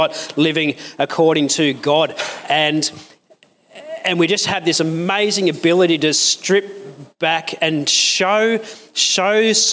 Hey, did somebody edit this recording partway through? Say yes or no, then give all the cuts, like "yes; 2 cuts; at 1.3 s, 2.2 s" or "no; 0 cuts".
no; 0 cuts